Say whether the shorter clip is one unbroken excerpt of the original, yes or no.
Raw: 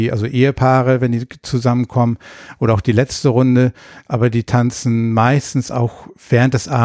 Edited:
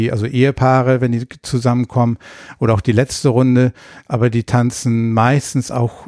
yes